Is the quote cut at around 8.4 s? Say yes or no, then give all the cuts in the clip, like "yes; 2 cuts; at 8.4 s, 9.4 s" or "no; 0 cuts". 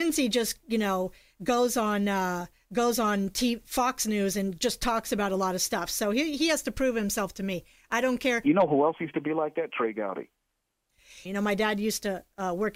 yes; 2 cuts; at 8.4 s, 11.3 s